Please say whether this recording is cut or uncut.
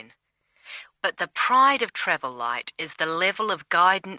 cut